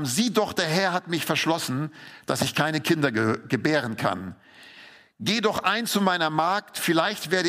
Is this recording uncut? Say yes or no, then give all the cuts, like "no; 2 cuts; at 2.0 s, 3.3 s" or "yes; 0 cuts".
yes; 0 cuts